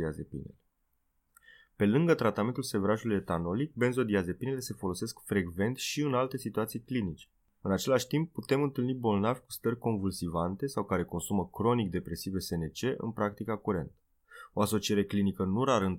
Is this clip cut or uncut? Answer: cut